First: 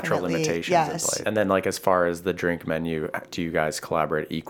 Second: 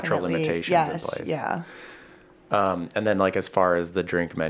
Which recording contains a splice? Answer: first; 1 cut; at 1.2 s

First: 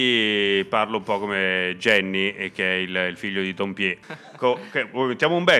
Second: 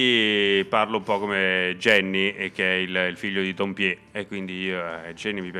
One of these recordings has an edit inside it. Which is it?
first; 1 cut; at 4.0 s

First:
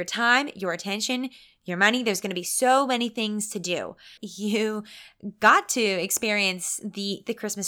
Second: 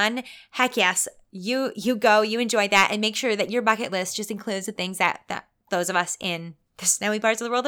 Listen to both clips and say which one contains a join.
first; 1 cut; at 4.2 s

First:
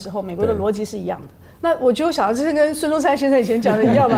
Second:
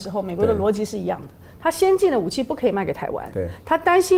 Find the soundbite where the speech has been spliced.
first; 1 cut; at 1.5 s

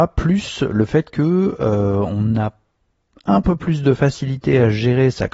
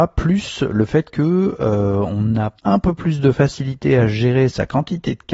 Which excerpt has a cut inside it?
second; 1 cut; at 2.6 s

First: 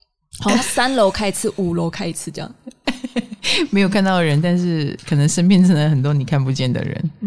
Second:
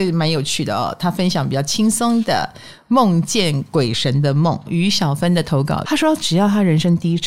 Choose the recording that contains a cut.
second; 1 cut; at 5.8 s

